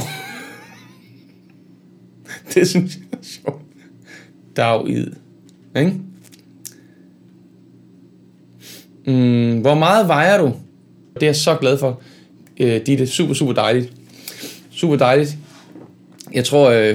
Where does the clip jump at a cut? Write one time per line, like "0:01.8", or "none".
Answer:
0:11.2

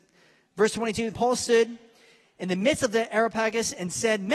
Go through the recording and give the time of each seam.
0:01.1

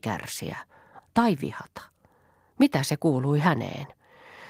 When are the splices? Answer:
0:01.0

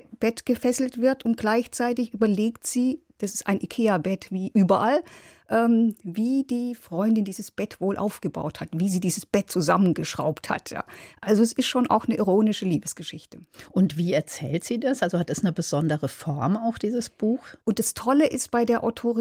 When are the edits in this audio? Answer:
0:17.6

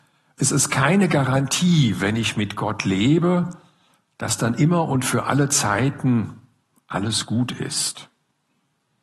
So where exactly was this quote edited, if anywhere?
none

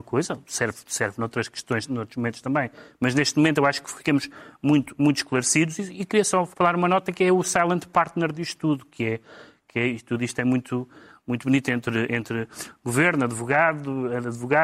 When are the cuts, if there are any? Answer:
0:06.5

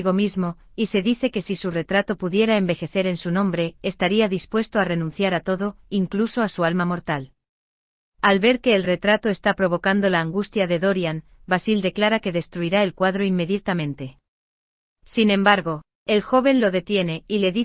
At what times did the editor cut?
none

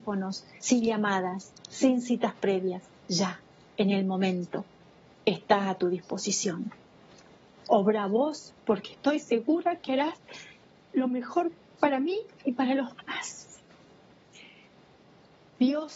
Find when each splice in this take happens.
0:07.5

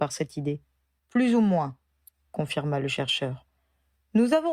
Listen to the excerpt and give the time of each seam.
0:01.0

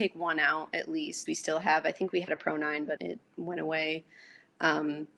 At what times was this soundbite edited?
0:01.3
0:03.0

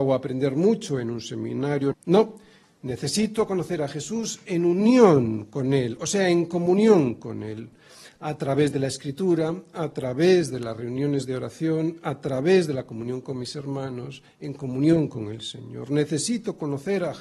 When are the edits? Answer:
0:01.9

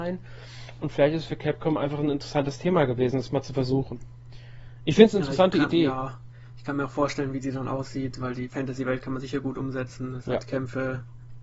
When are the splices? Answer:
none

